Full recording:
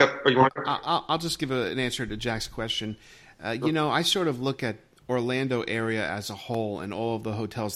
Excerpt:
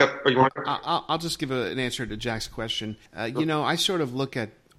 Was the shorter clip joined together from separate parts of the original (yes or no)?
yes